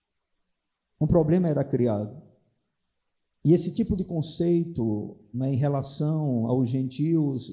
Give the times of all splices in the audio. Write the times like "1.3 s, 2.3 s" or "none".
3.3 s